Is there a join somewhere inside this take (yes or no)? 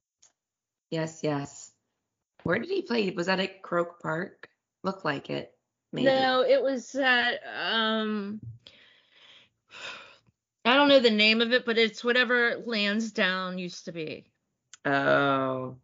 no